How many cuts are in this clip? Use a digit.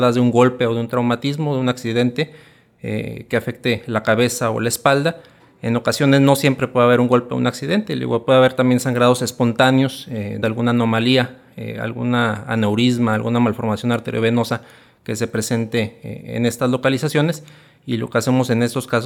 1